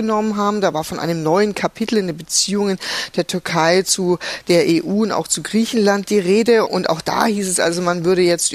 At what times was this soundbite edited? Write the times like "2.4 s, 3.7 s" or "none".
6.6 s